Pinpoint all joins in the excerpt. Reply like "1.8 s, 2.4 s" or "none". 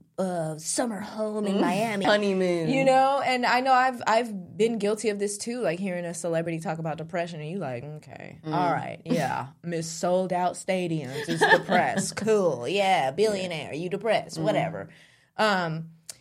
2.0 s